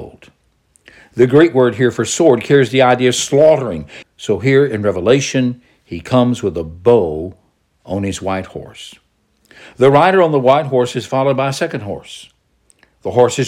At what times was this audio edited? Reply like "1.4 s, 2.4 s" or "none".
4.0 s